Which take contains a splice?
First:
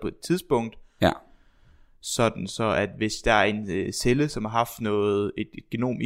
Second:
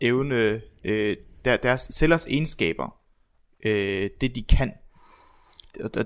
first; 1 cut; at 1.0 s

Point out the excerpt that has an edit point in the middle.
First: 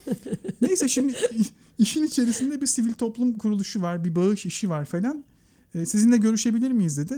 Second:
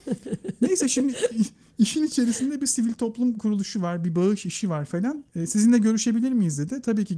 second; 1 cut; at 5.3 s

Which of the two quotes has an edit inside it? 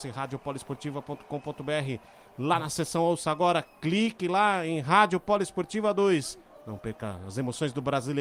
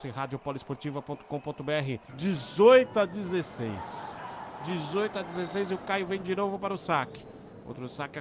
second; 1 cut; at 2.1 s

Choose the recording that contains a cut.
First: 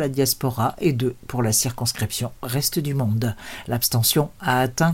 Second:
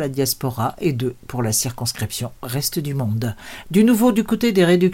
second; 1 cut; at 3.6 s

